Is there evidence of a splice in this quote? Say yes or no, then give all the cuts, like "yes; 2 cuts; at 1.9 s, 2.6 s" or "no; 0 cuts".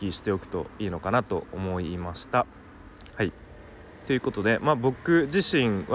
yes; 1 cut; at 3.1 s